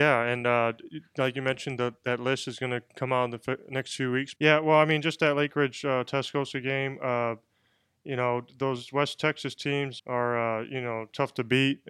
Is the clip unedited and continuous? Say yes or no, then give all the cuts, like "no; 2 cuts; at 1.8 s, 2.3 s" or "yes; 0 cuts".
no; 2 cuts; at 4.4 s, 10.0 s